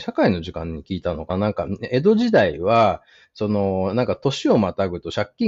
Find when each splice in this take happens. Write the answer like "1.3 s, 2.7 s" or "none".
1.3 s